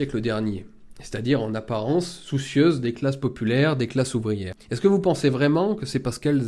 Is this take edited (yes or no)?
no